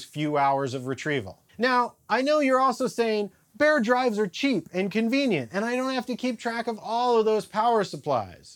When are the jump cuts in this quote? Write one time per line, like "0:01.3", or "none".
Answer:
0:01.5

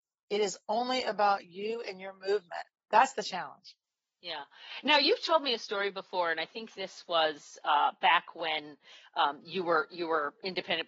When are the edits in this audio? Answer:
0:02.8

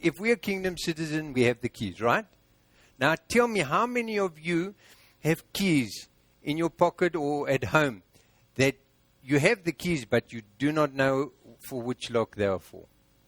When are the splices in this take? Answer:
none

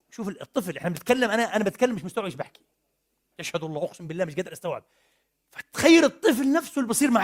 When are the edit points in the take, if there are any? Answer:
none

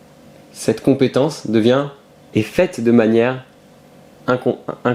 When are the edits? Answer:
0:02.3

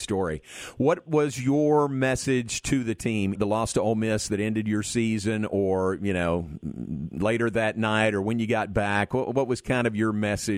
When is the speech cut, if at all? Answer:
0:03.4

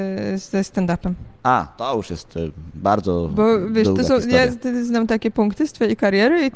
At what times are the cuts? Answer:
0:01.4

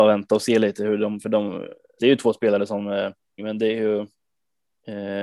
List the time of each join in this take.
0:02.0
0:03.4

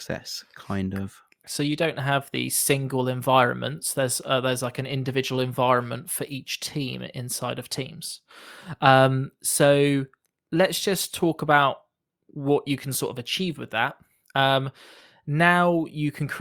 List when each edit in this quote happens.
0:01.4

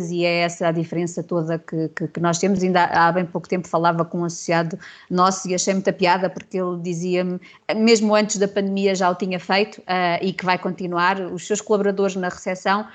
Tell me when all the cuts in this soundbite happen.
none

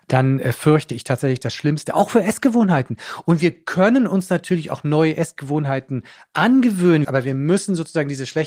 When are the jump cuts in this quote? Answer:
0:07.0

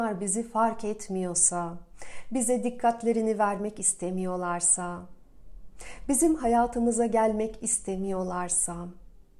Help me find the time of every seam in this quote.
none

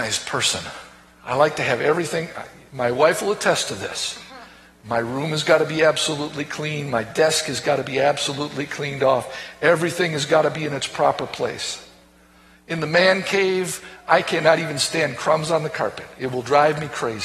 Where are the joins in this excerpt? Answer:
none

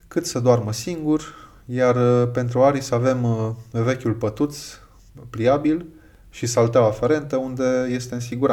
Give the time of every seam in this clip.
none

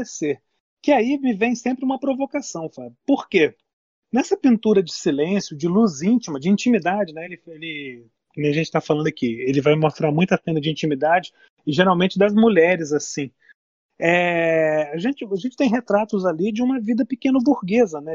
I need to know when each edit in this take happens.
none

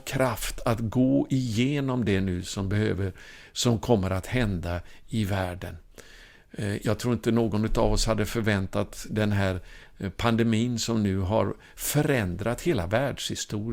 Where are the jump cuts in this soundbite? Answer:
0:06.8

